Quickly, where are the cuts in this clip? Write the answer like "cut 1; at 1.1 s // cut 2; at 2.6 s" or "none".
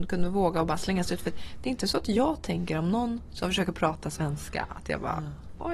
none